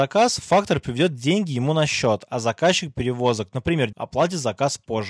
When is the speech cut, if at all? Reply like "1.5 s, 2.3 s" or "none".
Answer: 3.9 s